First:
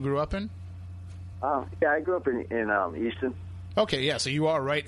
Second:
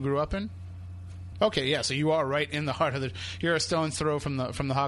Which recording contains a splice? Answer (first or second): second